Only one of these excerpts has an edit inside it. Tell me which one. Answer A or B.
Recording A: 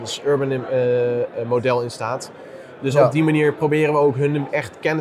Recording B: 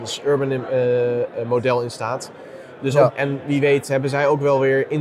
B